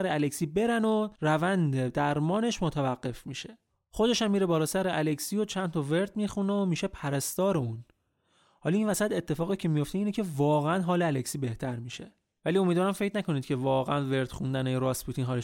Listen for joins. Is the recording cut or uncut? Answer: cut